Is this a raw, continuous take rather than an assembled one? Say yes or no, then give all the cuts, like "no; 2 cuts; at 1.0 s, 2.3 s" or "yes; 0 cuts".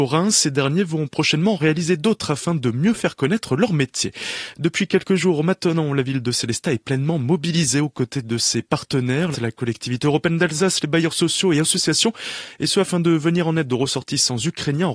no; 1 cut; at 9.3 s